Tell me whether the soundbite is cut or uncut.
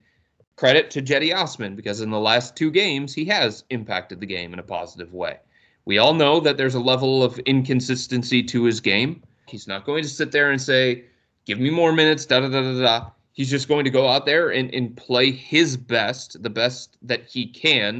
cut